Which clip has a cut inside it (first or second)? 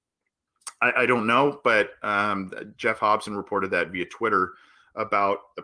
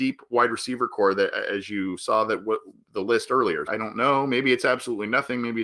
second